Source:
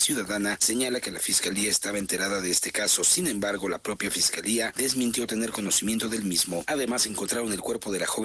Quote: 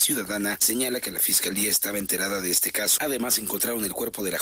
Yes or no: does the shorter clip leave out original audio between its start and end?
yes